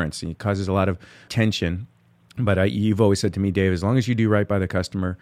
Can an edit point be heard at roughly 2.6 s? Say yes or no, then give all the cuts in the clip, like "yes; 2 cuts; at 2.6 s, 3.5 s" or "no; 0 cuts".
no; 1 cut; at 1.3 s